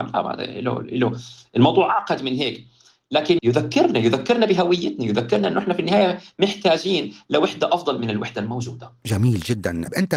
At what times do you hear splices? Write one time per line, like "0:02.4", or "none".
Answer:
0:03.4